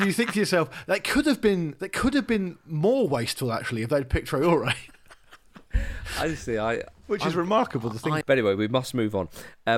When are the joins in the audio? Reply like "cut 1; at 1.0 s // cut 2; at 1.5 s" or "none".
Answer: cut 1; at 8.2 s